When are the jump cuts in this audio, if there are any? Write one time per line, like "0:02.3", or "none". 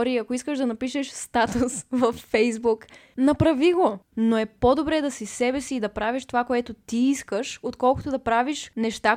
0:04.1